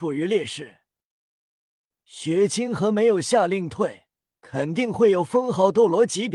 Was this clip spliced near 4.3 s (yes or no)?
yes